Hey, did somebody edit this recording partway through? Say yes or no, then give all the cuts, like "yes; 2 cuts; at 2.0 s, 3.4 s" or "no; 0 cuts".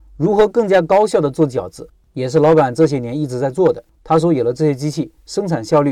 yes; 1 cut; at 4.0 s